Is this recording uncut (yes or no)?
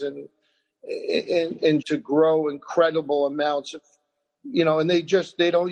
no